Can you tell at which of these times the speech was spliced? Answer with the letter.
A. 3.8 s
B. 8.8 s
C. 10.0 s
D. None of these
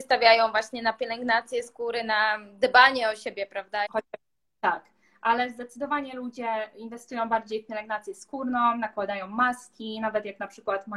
A